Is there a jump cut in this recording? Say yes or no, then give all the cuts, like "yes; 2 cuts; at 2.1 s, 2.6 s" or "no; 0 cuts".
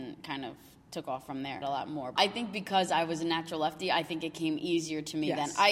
yes; 1 cut; at 1.6 s